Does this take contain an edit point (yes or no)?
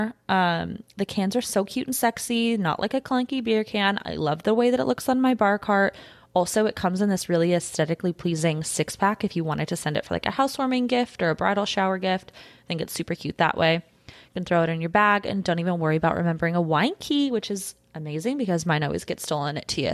no